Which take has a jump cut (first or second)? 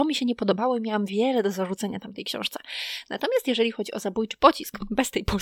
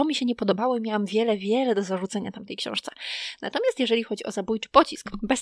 first